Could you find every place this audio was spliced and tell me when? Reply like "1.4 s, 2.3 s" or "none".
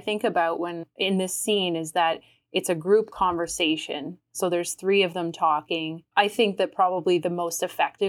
none